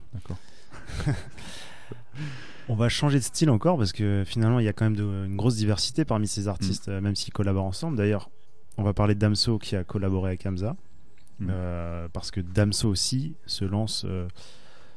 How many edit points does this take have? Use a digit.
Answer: 0